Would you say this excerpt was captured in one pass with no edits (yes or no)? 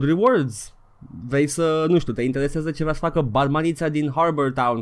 yes